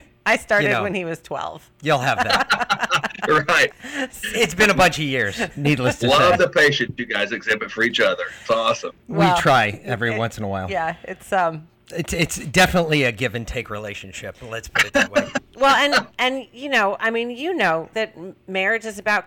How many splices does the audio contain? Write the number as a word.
one